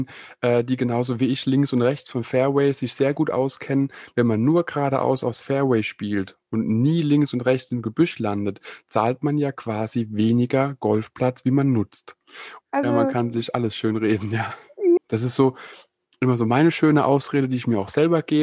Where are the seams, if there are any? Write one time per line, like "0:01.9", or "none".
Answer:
0:12.6
0:15.0